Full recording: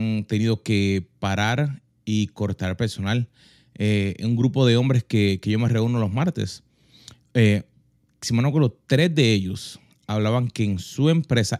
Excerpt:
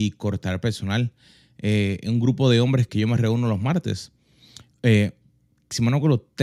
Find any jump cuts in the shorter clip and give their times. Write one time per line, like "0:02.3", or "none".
0:02.9